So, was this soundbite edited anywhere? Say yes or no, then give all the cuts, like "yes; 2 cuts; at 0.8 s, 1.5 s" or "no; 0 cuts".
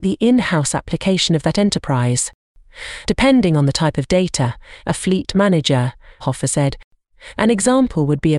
yes; 3 cuts; at 3.1 s, 4.8 s, 6.2 s